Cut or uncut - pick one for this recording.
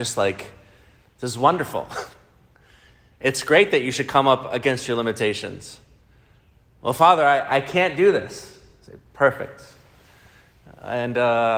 uncut